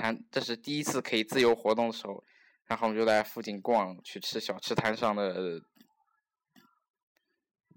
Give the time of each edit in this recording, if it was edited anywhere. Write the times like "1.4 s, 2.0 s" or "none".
none